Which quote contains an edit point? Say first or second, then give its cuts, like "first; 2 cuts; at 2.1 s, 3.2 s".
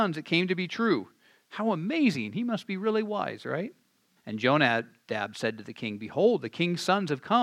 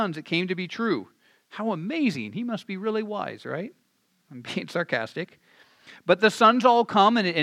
first; 1 cut; at 4.2 s